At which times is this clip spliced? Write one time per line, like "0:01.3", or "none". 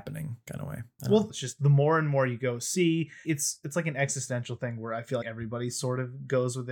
0:01.3
0:03.2
0:05.2